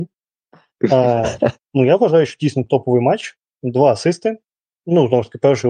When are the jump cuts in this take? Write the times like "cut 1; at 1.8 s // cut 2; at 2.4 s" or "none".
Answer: cut 1; at 1.5 s